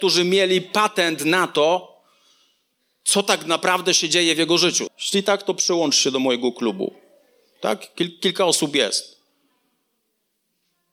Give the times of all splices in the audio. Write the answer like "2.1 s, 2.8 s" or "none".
4.9 s